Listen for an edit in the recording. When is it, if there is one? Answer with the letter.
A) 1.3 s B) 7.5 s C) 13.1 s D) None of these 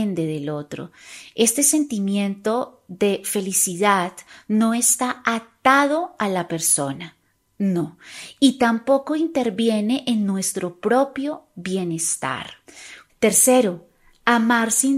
C